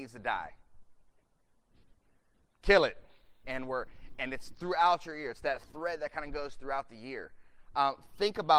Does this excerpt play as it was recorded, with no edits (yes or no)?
no